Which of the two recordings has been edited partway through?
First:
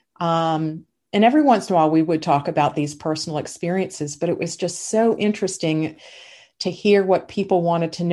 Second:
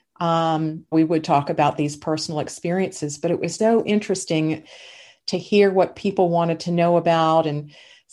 second; 2 cuts; at 0.9 s, 3.6 s

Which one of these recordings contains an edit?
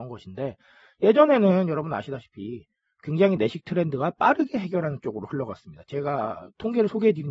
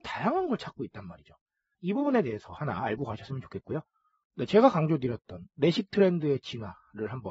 second; 2 cuts; at 1.8 s, 4.2 s

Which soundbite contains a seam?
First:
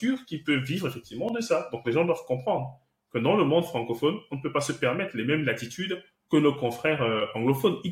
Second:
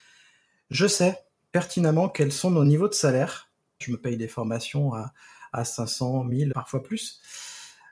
second; 2 cuts; at 3.8 s, 6.5 s

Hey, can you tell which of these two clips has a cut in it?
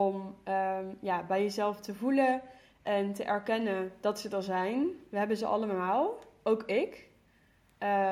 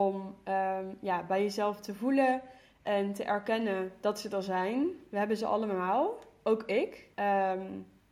second; 1 cut; at 7.1 s

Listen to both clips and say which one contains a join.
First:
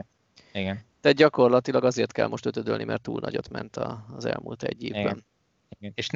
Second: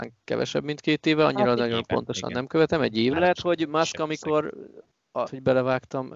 second; 2 cuts; at 3.1 s, 5.3 s

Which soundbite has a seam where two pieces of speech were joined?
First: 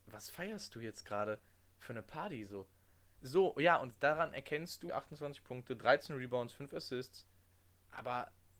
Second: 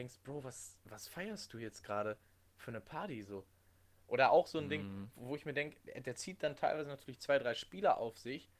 first; 2 cuts; at 3.2 s, 4.9 s

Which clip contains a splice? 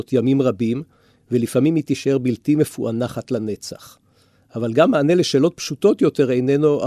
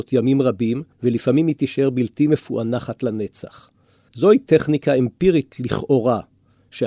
second; 2 cuts; at 0.9 s, 4.1 s

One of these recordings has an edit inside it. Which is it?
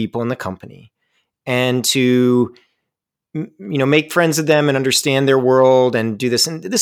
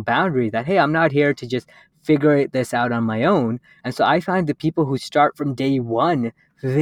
second; 1 cut; at 3.8 s

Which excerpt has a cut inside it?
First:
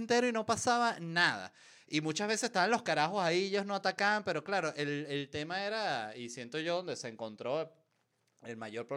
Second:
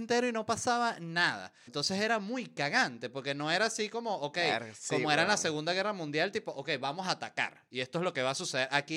second; 1 cut; at 1.7 s

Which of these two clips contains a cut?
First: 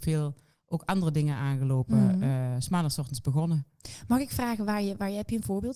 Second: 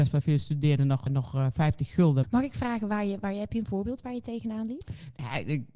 second; 2 cuts; at 1.1 s, 2.2 s

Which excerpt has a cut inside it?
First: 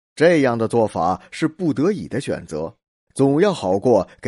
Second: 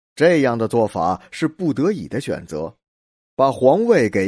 first; 1 cut; at 3.1 s

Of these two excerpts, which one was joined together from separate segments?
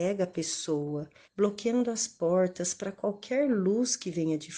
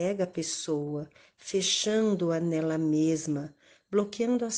first; 1 cut; at 1.3 s

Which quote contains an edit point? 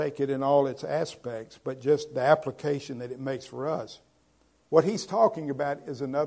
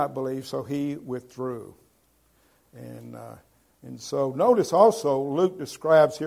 first; 1 cut; at 4.7 s

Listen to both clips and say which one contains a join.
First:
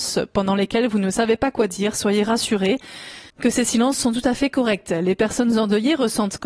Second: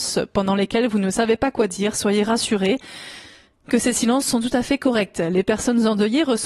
first; 1 cut; at 3.3 s

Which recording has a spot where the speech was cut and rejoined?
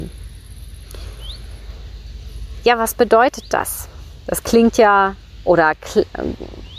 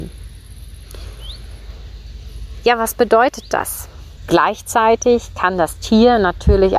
second; 1 cut; at 4.2 s

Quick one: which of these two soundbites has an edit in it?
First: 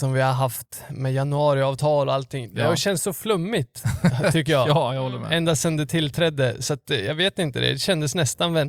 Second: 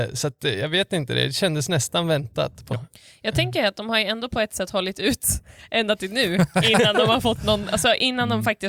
second; 1 cut; at 2.7 s

